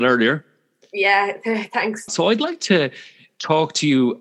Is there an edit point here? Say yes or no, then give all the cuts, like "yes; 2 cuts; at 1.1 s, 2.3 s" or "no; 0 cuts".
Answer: yes; 1 cut; at 2.1 s